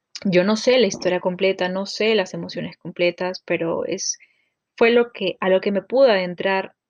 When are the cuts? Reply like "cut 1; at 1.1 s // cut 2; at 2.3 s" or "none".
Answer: none